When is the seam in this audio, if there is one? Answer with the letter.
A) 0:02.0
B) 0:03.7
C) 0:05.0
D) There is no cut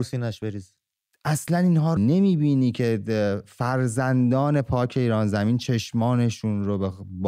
A